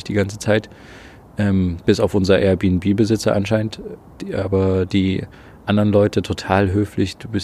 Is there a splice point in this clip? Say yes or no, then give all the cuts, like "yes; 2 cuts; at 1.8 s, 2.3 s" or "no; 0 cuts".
no; 0 cuts